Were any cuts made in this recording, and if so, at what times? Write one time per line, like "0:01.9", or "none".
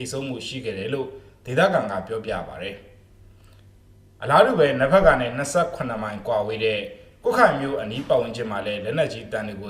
none